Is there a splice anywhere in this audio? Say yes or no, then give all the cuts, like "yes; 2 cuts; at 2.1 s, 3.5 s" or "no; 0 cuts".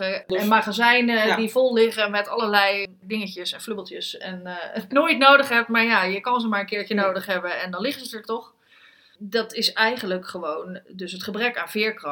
yes; 1 cut; at 4.9 s